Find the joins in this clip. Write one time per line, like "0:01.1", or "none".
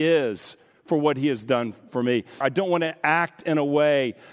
0:02.4